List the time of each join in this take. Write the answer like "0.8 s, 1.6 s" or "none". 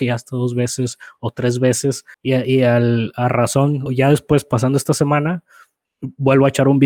2.1 s, 3.9 s